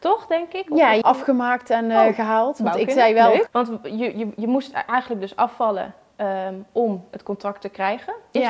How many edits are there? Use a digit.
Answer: 2